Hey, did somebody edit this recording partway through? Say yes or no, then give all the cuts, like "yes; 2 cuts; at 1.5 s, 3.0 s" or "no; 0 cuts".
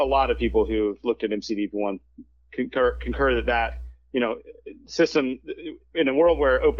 no; 0 cuts